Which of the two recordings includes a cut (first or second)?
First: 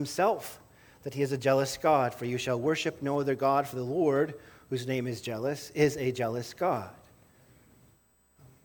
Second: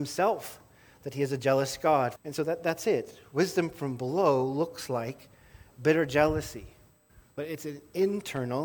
second